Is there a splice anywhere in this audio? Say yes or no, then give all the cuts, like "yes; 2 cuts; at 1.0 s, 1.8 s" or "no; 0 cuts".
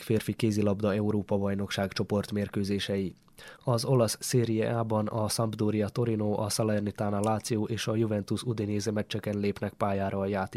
yes; 1 cut; at 3.6 s